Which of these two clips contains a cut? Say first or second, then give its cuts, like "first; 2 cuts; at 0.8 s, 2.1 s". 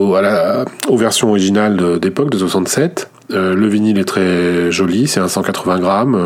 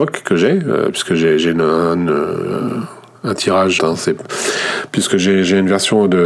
second; 1 cut; at 3.8 s